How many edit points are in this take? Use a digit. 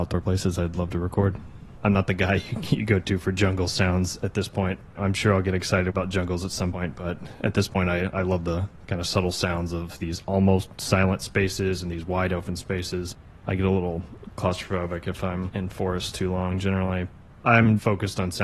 1